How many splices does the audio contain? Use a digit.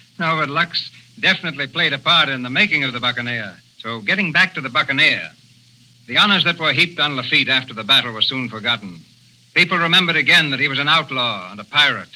1